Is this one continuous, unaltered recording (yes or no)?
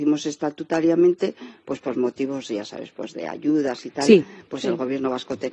yes